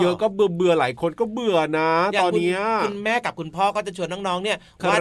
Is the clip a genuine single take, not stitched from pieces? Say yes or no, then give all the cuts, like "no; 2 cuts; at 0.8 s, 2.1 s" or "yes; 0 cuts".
no; 1 cut; at 2.3 s